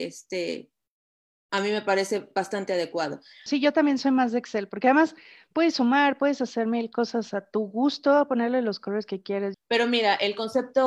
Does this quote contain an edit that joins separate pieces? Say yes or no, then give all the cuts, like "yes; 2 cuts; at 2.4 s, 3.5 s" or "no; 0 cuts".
yes; 2 cuts; at 3.5 s, 9.5 s